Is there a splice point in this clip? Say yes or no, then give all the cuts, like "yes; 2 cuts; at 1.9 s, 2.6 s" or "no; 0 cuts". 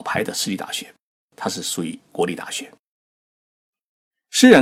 yes; 1 cut; at 1.2 s